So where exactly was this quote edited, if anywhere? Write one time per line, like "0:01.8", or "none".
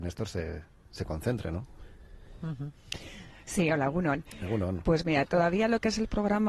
none